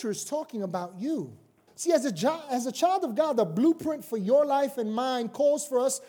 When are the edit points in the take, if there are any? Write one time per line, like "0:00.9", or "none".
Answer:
0:01.7